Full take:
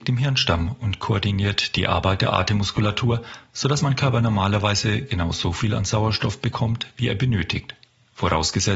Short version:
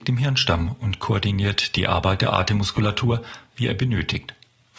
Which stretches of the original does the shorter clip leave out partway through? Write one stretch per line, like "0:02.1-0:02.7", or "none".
0:03.5-0:06.9